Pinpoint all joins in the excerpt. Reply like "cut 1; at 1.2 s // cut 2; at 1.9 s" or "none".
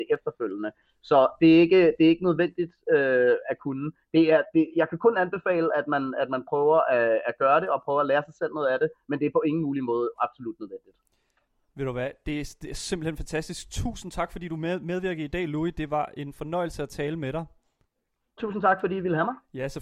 cut 1; at 18.4 s